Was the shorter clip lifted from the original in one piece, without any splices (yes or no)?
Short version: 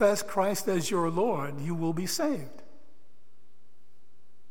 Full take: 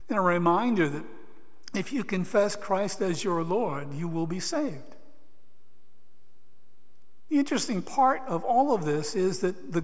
yes